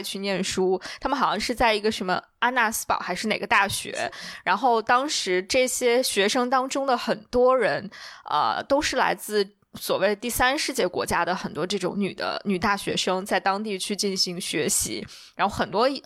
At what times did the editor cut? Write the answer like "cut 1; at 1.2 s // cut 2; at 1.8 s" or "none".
none